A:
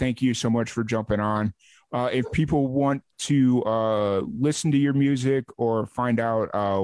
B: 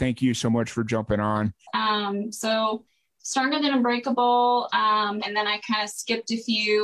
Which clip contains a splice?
B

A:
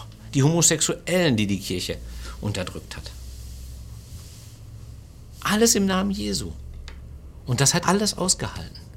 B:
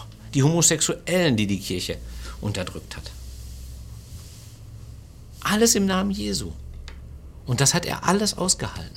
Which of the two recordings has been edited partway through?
A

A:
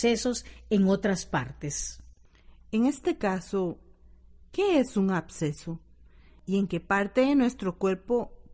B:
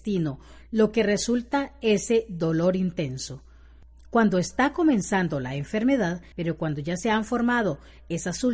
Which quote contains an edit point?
B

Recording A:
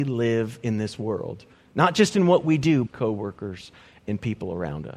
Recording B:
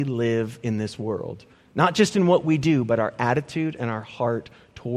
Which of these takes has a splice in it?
A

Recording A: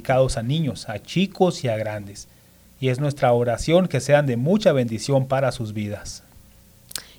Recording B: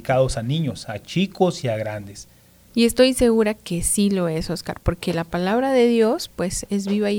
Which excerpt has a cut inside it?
B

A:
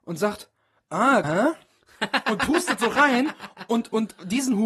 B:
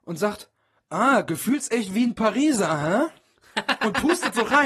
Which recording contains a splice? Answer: A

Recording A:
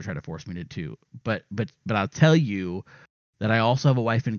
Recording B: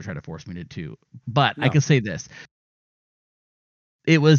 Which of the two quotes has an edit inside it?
B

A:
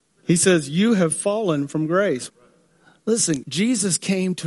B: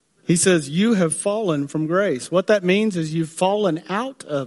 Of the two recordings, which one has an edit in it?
A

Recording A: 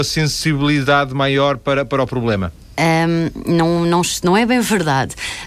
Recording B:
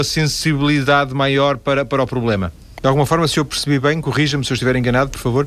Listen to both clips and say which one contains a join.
B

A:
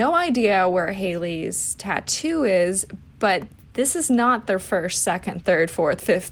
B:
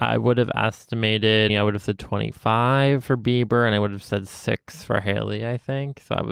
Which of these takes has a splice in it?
B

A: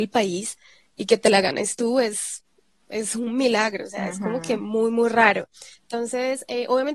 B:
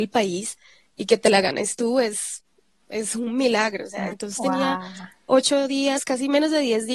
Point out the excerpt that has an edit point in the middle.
B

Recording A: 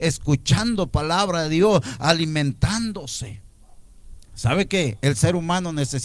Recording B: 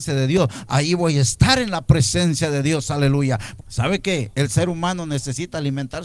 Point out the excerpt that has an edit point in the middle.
B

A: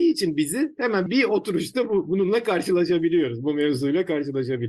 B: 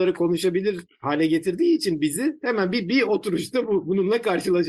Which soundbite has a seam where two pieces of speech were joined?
A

